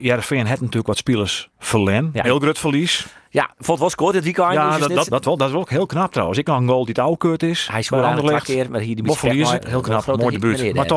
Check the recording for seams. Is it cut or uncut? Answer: cut